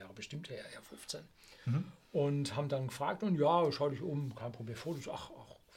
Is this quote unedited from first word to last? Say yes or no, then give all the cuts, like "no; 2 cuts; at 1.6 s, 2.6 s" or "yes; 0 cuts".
yes; 0 cuts